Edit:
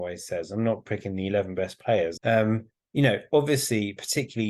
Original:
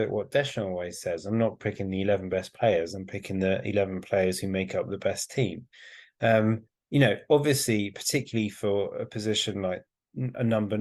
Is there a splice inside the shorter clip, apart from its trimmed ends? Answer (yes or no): yes